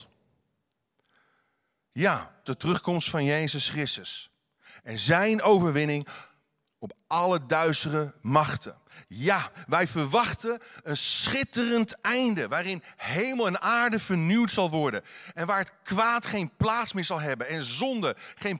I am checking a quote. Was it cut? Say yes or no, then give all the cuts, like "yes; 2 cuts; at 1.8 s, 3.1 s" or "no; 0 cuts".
yes; 1 cut; at 2.5 s